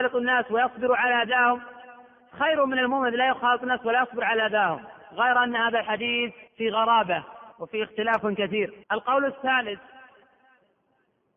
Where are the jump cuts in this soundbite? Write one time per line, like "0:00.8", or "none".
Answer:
0:06.5
0:07.5
0:08.8